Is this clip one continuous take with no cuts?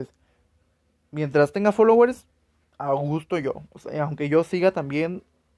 yes; 0 cuts

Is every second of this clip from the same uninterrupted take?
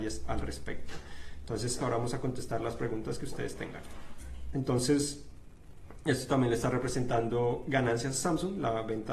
no; 2 cuts; at 1.8 s, 4.5 s

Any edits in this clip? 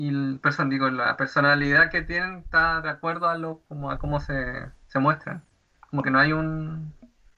no; 0 cuts

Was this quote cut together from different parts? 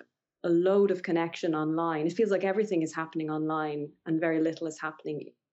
no; 0 cuts

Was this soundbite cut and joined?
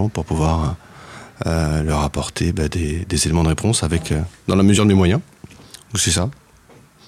no; 0 cuts

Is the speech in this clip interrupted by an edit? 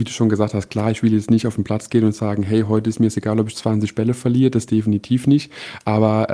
no; 0 cuts

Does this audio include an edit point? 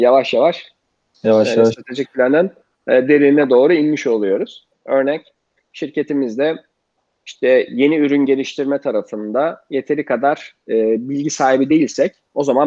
yes; 1 cut; at 4.7 s

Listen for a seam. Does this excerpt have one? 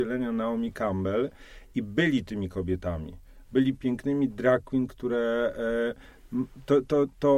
yes; 1 cut; at 3.7 s

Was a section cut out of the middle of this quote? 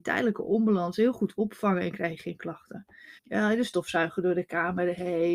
yes; 1 cut; at 3.2 s

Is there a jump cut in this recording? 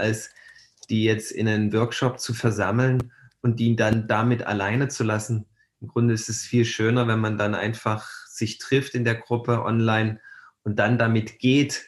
no; 0 cuts

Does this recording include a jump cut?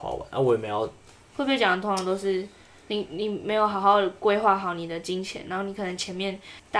yes; 1 cut; at 1.3 s

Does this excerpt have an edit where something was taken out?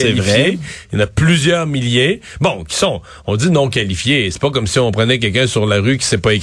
no; 0 cuts

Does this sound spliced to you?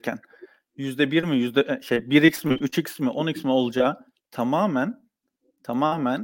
no; 0 cuts

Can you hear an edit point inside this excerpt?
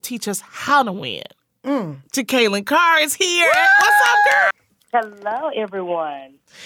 yes; 1 cut; at 4.5 s

